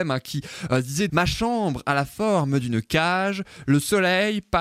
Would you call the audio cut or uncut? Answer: cut